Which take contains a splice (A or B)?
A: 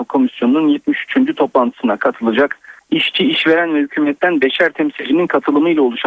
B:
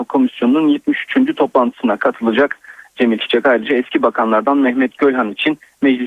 A